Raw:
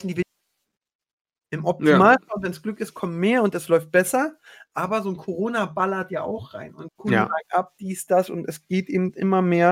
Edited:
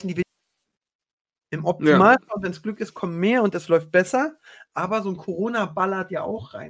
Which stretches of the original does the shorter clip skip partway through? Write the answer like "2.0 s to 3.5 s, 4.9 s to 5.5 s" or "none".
none